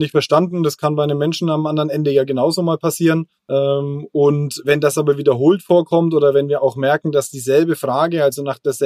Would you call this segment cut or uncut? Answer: cut